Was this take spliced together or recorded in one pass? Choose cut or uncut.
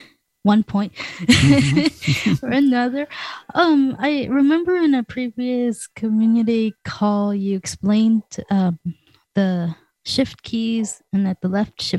uncut